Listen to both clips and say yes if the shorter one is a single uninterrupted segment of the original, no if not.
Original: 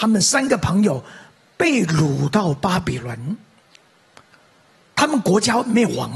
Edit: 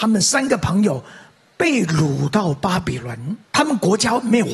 no